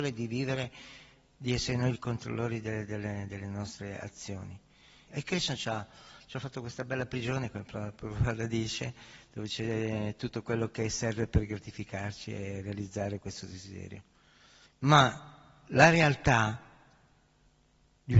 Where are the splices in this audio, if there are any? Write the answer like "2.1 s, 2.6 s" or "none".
5.1 s, 14.7 s